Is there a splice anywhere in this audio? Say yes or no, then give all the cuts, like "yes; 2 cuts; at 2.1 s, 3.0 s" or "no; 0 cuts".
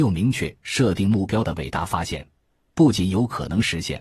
no; 0 cuts